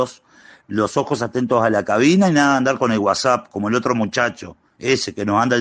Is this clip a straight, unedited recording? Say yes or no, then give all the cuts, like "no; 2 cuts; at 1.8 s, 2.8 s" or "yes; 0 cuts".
yes; 0 cuts